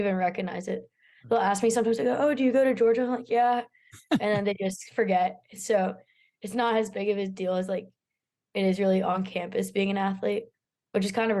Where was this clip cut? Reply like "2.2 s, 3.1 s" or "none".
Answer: none